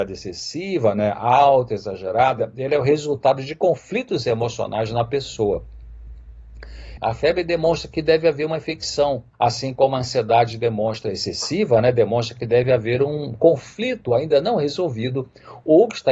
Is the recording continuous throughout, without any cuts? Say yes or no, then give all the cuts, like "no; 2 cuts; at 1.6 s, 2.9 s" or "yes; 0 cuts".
no; 2 cuts; at 7.0 s, 9.3 s